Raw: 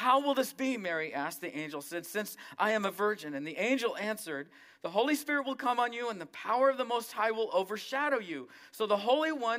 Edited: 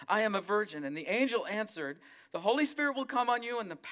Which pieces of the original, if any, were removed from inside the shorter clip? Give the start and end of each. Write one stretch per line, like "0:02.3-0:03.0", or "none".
none